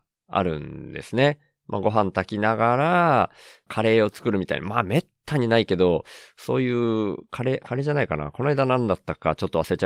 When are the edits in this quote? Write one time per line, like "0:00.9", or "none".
none